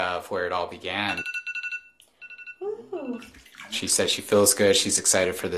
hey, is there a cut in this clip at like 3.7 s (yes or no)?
no